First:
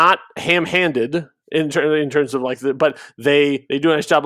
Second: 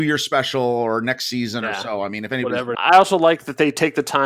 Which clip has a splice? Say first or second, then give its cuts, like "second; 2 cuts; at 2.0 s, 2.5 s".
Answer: second; 1 cut; at 2.7 s